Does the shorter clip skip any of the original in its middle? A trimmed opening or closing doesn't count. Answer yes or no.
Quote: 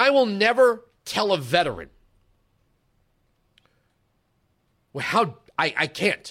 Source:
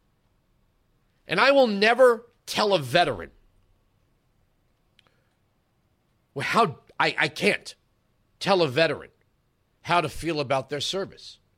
no